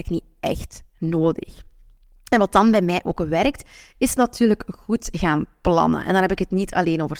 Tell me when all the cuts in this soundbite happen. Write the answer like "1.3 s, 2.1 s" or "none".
none